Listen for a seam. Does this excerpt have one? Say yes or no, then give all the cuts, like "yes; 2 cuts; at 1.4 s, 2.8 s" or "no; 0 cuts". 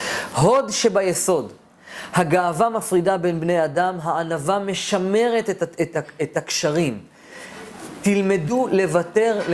no; 0 cuts